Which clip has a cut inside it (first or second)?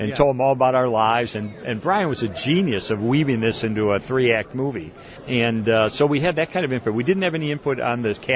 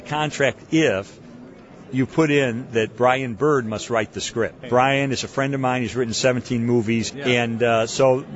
second